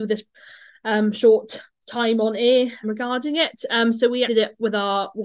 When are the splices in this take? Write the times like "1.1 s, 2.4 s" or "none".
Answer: 2.8 s, 4.3 s